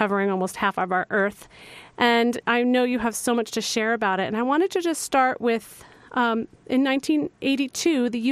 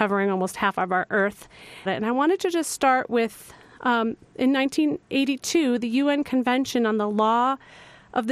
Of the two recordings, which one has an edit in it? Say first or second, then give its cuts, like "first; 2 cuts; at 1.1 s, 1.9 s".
second; 1 cut; at 1.9 s